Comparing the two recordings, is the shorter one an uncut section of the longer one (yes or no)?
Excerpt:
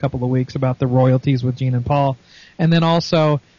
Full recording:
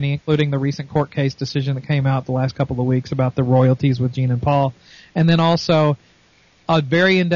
yes